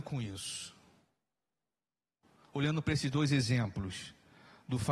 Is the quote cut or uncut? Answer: uncut